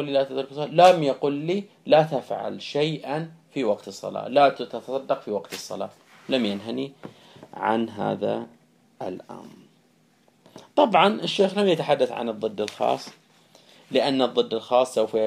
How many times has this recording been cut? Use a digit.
0